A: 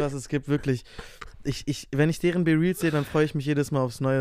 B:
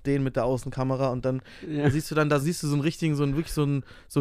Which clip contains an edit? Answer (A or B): B